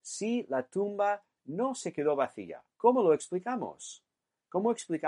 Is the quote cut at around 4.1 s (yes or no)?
no